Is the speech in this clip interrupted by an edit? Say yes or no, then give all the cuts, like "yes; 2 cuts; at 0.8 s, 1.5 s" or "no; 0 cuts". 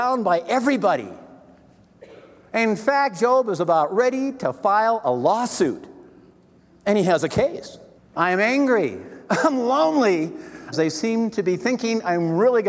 yes; 2 cuts; at 8.0 s, 10.7 s